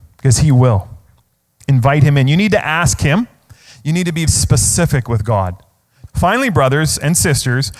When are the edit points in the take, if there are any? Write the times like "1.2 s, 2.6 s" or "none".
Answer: 4.3 s, 6.1 s